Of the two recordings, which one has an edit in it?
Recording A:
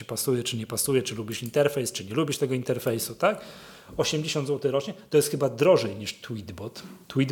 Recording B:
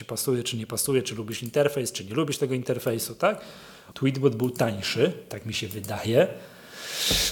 B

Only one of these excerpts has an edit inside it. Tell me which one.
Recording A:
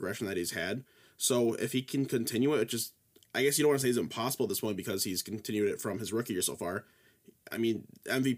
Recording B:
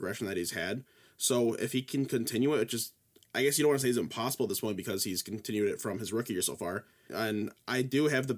B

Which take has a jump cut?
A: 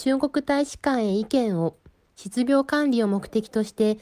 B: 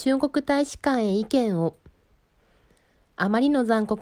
A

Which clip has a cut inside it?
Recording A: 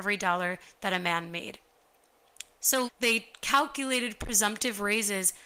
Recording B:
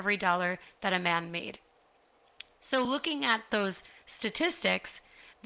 A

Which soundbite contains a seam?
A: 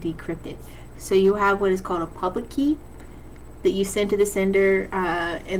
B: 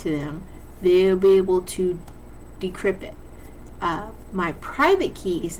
A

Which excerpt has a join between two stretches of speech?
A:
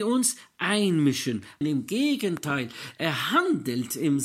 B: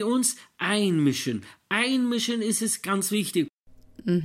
A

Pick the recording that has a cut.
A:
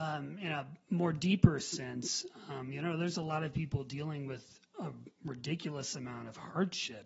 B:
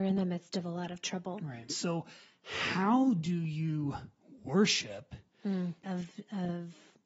B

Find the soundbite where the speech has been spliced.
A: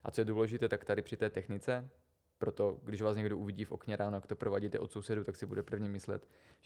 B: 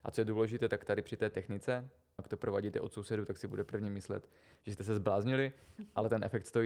B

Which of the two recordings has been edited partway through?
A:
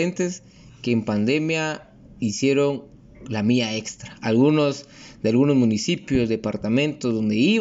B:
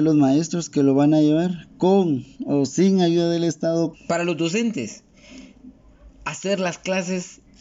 B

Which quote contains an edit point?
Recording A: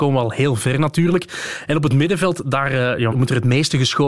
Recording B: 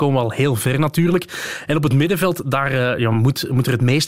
A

